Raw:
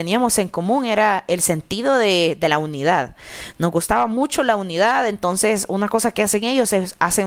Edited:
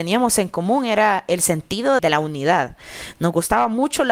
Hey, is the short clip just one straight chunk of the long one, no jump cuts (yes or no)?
no